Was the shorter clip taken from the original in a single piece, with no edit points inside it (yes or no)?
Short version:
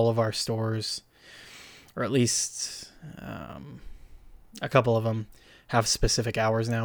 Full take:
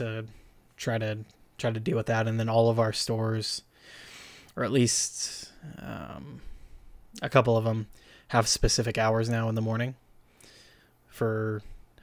yes